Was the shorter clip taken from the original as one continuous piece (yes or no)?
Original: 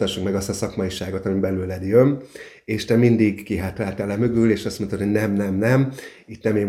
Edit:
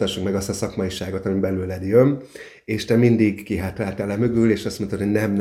yes